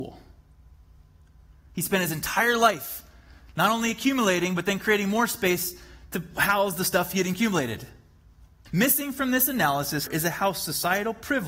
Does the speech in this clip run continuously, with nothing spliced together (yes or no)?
no